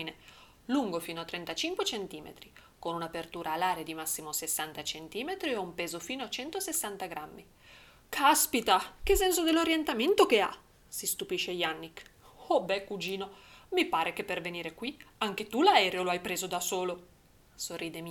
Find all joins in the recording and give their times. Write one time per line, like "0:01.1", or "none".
0:08.0